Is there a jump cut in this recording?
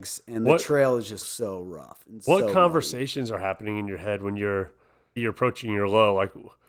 yes; 2 cuts; at 1.2 s, 5.2 s

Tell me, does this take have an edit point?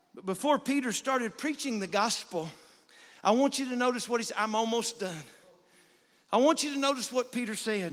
no; 0 cuts

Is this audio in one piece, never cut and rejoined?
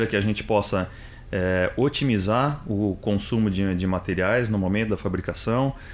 yes; 0 cuts

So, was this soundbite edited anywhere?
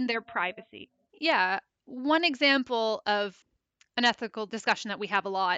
yes; 1 cut; at 1.1 s

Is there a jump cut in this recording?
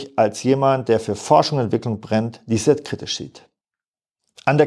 no; 0 cuts

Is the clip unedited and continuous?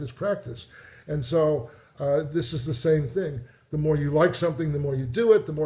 yes; 0 cuts

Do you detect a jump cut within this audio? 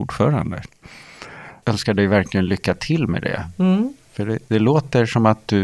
yes; 1 cut; at 1.6 s

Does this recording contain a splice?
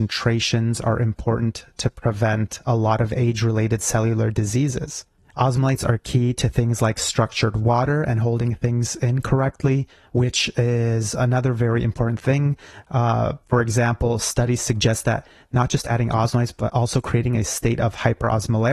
no; 0 cuts

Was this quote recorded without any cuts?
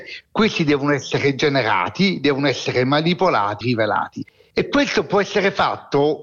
no; 1 cut; at 3.6 s

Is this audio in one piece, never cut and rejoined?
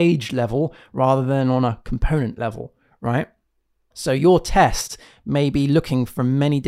no; 1 cut; at 3.9 s

